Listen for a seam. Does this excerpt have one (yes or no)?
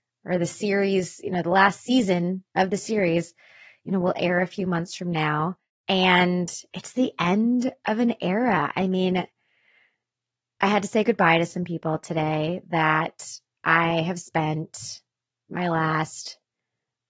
no